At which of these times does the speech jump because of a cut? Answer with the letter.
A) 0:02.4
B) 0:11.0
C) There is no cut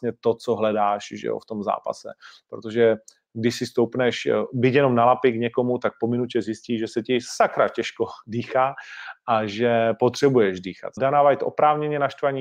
B